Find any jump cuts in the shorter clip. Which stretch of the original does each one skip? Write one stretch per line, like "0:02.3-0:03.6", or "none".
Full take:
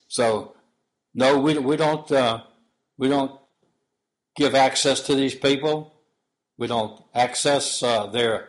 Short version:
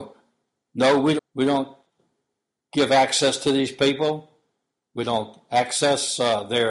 0:01.6-0:02.8